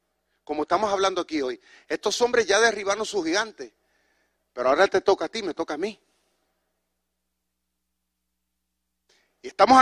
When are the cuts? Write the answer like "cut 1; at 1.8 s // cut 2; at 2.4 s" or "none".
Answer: none